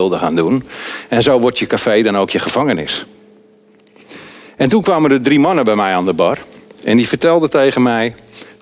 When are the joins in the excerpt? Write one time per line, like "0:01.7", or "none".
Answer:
none